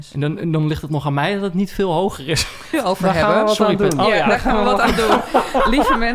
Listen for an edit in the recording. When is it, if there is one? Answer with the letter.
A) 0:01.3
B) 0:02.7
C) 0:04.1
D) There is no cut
B